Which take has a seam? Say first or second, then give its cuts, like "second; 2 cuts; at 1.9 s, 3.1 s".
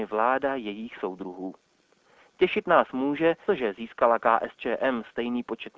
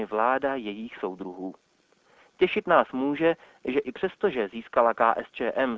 first; 1 cut; at 3.5 s